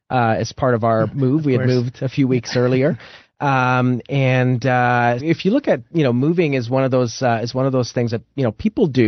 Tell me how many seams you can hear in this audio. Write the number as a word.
one